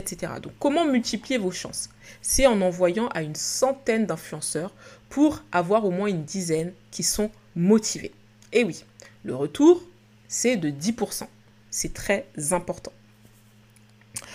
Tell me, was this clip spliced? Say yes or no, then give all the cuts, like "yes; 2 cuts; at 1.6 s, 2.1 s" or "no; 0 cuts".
yes; 1 cut; at 11.6 s